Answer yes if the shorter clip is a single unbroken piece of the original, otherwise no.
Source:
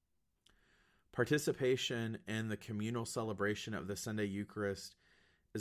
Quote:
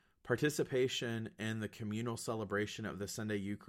yes